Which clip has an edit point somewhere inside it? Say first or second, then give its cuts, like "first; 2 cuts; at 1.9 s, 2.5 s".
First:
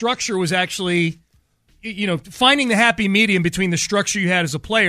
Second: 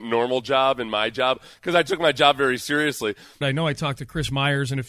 second; 1 cut; at 3.4 s